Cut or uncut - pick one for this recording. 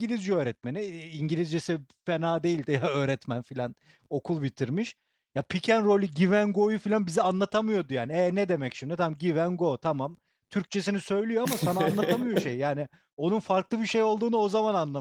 uncut